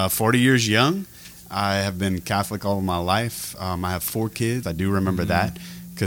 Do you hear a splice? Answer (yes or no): yes